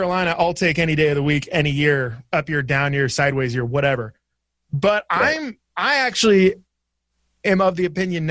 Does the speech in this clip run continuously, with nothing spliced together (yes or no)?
yes